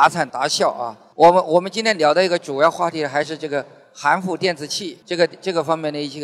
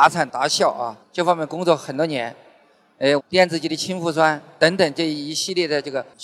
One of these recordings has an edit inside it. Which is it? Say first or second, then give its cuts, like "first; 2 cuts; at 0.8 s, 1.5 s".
second; 2 cuts; at 1.0 s, 3.2 s